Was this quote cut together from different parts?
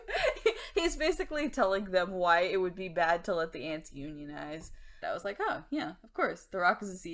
yes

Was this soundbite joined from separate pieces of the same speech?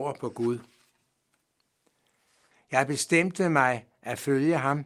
yes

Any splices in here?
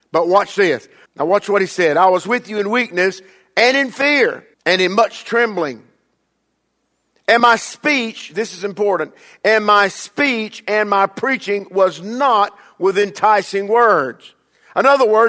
yes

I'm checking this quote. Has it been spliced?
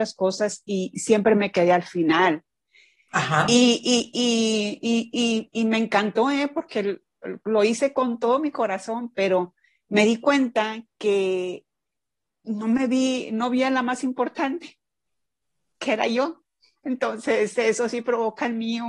no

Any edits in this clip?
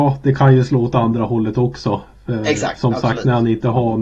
no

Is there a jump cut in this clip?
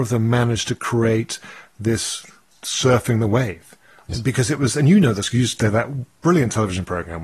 yes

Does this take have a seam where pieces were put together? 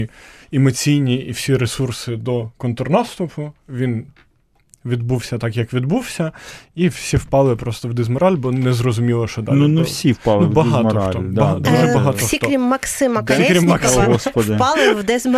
no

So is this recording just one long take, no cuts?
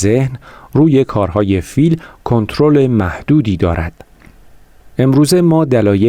yes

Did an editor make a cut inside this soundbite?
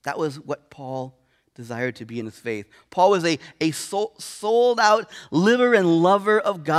no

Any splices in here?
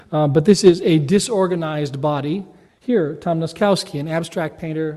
yes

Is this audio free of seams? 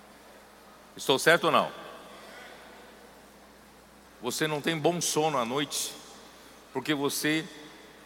no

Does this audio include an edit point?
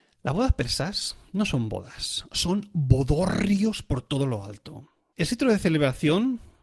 yes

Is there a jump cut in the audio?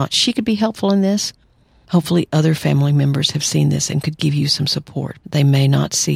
yes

